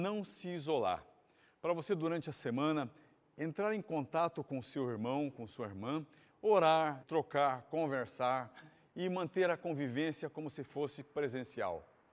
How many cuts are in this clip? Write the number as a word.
one